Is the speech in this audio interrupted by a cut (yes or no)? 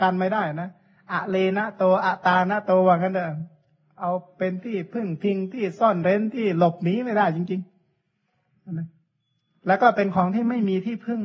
no